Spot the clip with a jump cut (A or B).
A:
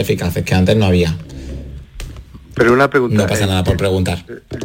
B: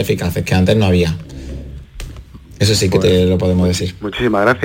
A